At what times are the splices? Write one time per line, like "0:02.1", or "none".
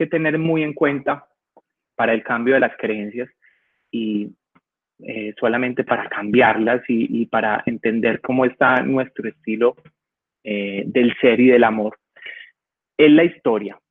none